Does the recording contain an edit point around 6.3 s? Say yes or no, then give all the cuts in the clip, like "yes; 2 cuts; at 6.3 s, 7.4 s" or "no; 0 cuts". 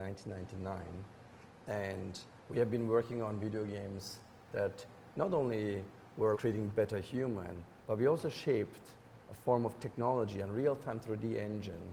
yes; 1 cut; at 6.3 s